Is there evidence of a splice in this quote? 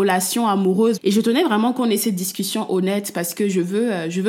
yes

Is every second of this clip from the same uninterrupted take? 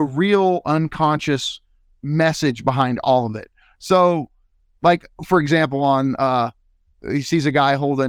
yes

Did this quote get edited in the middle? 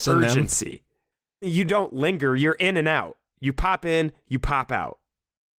no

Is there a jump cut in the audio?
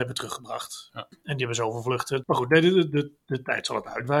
yes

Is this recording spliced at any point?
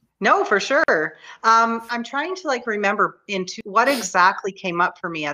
yes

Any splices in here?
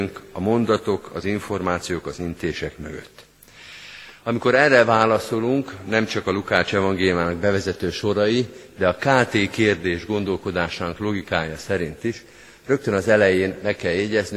no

